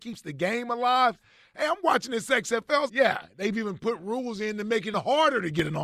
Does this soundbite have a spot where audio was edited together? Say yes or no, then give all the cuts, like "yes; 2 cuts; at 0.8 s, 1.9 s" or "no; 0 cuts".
yes; 2 cuts; at 2.9 s, 4.9 s